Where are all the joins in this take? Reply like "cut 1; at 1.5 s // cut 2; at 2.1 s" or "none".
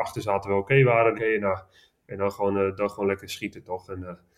cut 1; at 1.1 s